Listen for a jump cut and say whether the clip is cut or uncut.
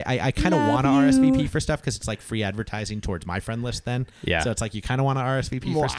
uncut